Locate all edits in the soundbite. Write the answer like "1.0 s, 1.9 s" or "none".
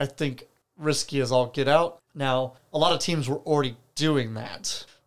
2.1 s